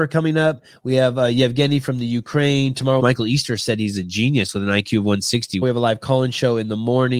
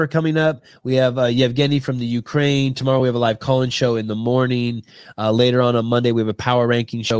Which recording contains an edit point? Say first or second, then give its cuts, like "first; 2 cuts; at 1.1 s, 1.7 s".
first; 2 cuts; at 3.0 s, 5.6 s